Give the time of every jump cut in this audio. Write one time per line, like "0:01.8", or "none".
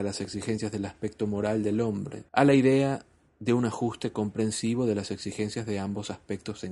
0:02.3